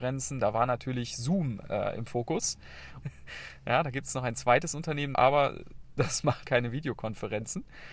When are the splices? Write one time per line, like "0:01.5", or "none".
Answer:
0:03.0
0:05.1
0:06.4